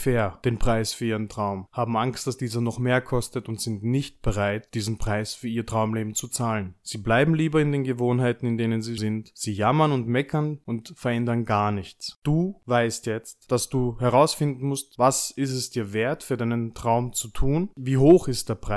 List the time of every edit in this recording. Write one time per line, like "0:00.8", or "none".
0:09.0